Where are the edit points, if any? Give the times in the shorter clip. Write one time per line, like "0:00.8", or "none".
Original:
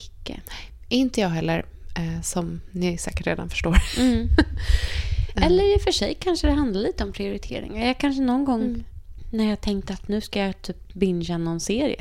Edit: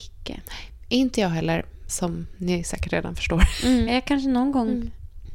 0:01.9
0:03.9